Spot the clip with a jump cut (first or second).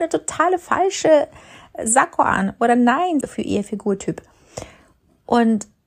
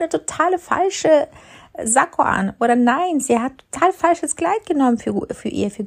first